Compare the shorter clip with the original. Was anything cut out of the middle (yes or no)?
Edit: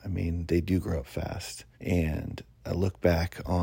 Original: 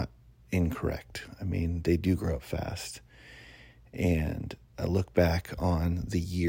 yes